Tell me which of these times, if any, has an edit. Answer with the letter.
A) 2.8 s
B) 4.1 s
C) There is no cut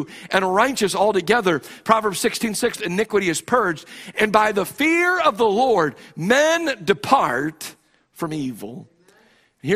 A